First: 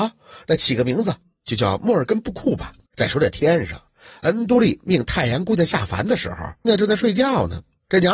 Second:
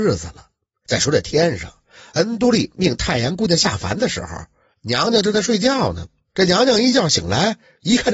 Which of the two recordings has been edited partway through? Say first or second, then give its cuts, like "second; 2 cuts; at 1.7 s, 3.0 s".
first; 2 cuts; at 2.9 s, 6.6 s